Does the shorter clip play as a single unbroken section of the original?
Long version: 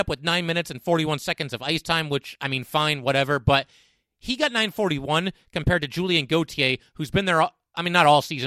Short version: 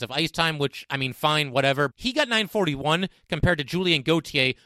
no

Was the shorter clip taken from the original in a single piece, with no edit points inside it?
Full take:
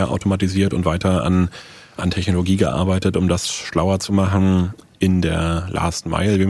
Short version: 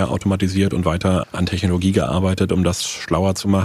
no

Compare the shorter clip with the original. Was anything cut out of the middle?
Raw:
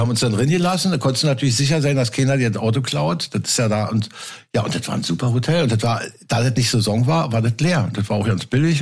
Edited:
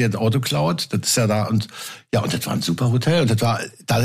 no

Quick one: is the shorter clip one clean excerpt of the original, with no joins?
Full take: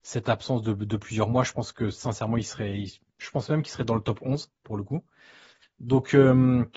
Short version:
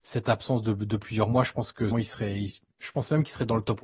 no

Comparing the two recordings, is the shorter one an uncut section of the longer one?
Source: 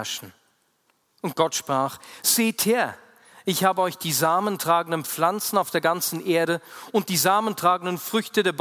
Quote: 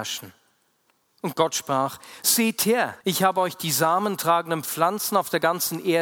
no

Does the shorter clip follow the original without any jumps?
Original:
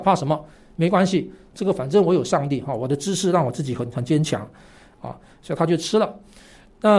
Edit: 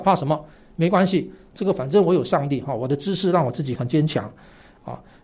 no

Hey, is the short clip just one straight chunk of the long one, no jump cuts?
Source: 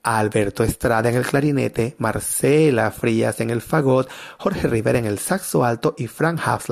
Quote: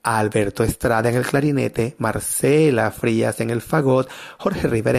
yes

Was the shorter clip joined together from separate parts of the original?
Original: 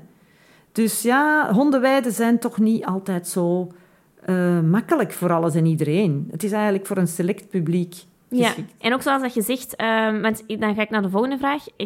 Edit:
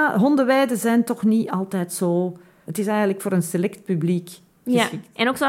yes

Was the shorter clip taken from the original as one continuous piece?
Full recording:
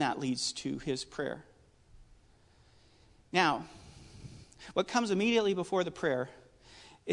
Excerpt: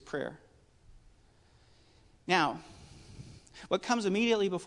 yes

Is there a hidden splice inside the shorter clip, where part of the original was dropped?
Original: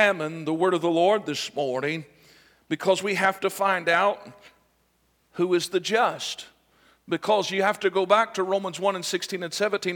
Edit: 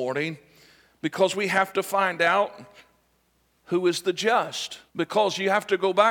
yes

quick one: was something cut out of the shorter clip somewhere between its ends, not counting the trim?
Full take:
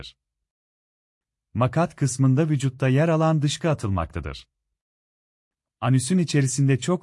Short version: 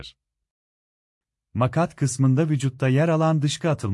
no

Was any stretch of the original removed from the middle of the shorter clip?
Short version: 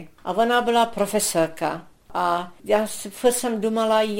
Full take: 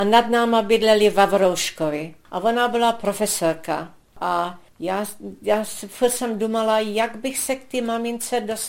yes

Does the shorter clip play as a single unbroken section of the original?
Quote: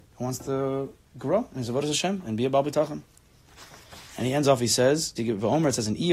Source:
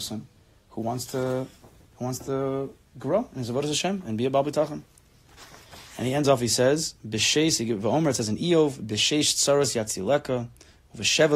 no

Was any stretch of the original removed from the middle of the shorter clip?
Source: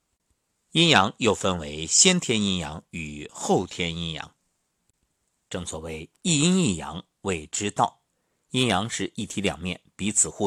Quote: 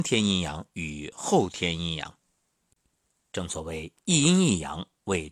no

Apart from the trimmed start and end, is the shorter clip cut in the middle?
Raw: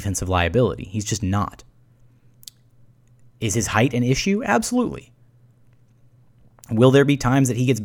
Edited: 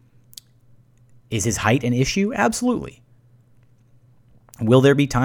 no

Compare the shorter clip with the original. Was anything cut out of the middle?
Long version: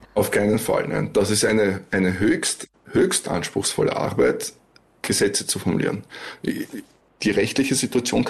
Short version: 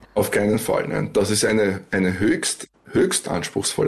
no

